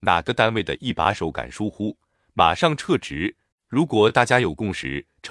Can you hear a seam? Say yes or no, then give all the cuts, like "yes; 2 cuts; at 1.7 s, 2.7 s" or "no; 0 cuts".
yes; 1 cut; at 3.5 s